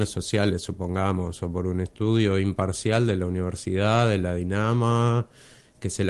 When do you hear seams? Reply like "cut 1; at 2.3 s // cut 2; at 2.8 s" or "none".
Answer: none